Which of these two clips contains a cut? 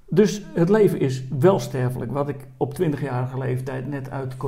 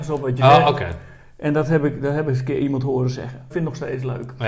second; 1 cut; at 3.5 s

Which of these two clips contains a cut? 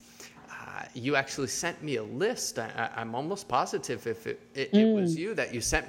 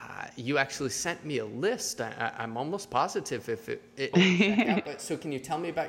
second; 1 cut; at 4.1 s

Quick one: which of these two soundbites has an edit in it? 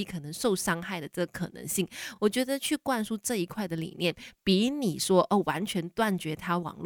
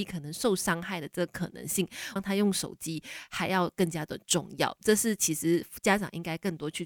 second; 1 cut; at 2.2 s

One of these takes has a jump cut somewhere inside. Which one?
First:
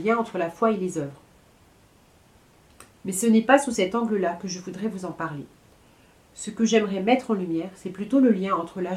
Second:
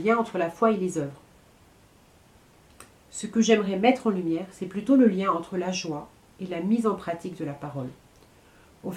second; 1 cut; at 2.9 s

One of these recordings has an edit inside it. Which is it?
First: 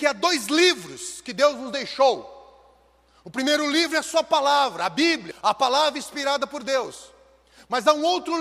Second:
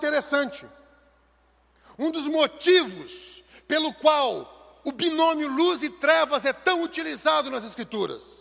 first; 1 cut; at 5.3 s

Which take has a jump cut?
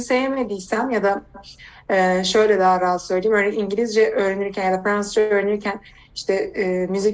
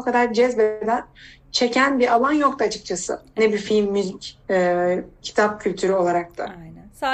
second; 1 cut; at 4.4 s

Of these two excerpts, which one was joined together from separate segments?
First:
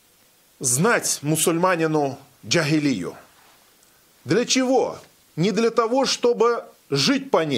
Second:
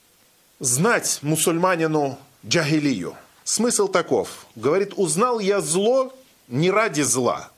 second; 1 cut; at 3.4 s

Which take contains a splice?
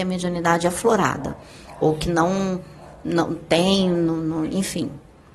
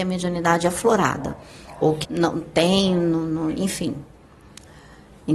second; 1 cut; at 2.0 s

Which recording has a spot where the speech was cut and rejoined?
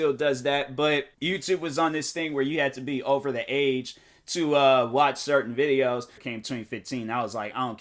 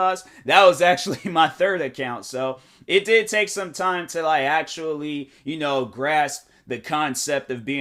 first; 2 cuts; at 1.1 s, 6.2 s

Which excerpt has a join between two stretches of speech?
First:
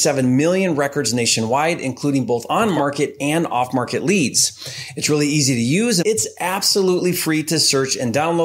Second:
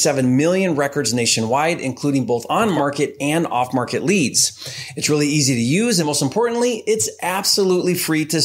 first; 1 cut; at 6.0 s

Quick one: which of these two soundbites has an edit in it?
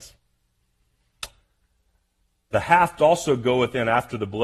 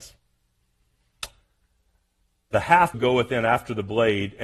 second; 1 cut; at 2.9 s

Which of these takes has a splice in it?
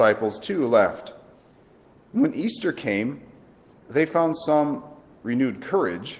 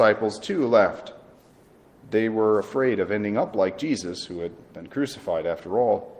first; 1 cut; at 1.9 s

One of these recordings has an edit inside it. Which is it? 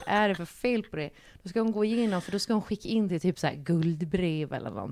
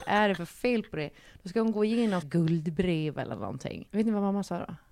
second; 2 cuts; at 2.2 s, 3.9 s

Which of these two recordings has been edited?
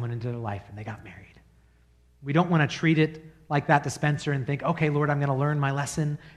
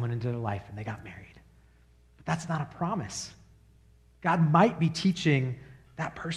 first; 1 cut; at 2.1 s

